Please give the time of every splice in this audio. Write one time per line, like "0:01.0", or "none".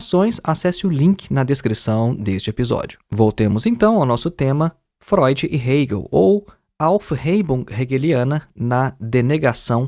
none